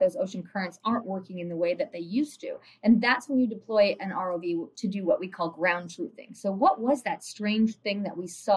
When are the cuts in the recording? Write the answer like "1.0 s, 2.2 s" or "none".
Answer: none